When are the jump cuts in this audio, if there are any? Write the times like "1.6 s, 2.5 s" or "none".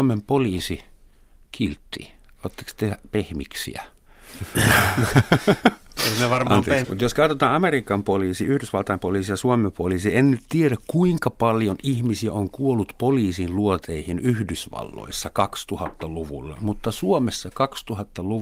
6.8 s